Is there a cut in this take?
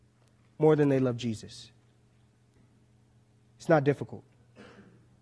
no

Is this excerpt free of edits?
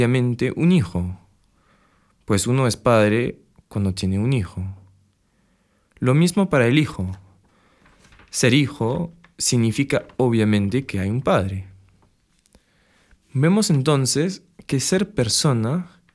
yes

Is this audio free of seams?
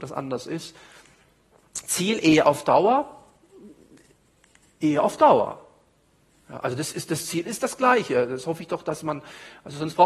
yes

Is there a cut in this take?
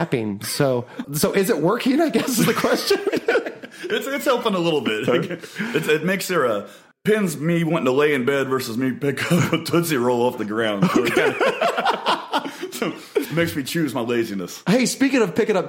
yes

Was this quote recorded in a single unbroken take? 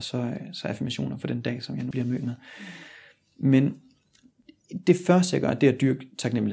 no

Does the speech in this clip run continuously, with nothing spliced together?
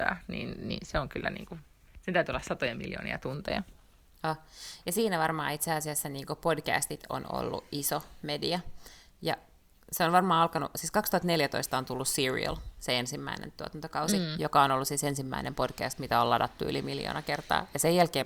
yes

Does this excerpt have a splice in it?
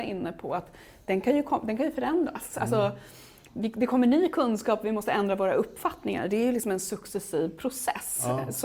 no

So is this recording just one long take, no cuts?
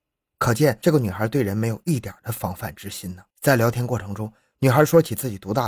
no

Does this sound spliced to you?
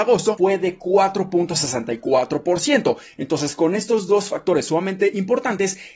no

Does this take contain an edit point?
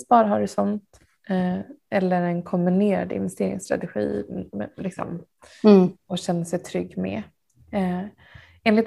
yes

